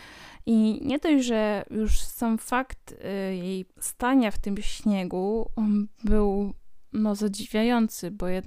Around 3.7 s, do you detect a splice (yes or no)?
yes